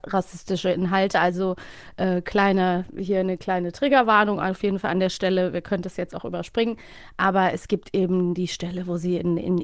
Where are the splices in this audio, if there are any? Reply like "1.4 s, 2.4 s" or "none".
none